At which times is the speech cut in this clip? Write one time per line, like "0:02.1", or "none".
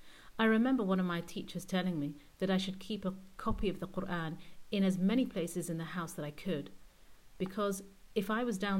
none